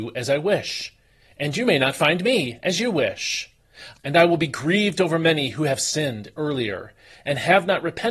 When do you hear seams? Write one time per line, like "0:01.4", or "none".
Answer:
0:03.9